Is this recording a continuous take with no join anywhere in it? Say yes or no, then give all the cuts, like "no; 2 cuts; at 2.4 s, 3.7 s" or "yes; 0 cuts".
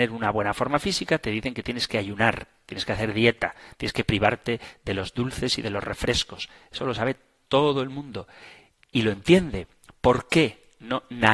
yes; 0 cuts